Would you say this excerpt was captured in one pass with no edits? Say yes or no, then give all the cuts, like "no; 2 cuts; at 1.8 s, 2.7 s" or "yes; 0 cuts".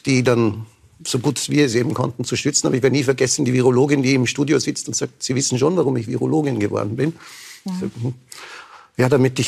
yes; 0 cuts